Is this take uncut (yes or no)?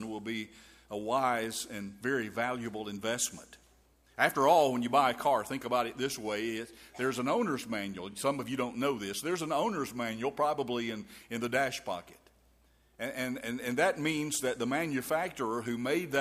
yes